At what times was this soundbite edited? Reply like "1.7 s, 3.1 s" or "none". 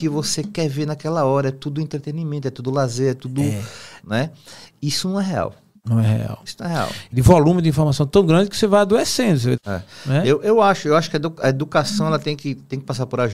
4.0 s, 7.1 s, 9.6 s